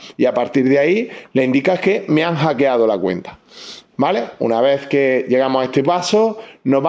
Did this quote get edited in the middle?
no; 0 cuts

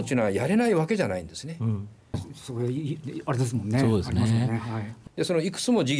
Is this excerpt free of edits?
no; 2 cuts; at 2.1 s, 5.1 s

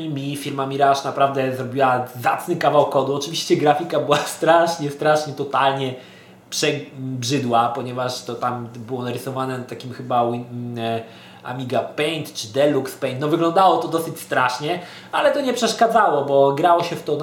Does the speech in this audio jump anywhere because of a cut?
no; 0 cuts

